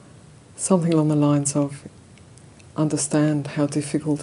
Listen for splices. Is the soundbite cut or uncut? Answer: cut